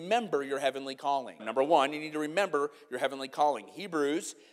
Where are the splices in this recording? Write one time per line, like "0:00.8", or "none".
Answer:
0:01.4